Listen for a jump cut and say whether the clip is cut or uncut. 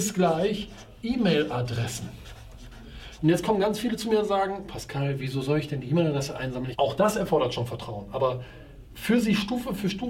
cut